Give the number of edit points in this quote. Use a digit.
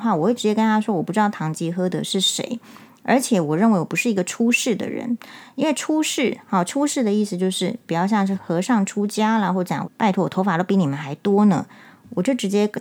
2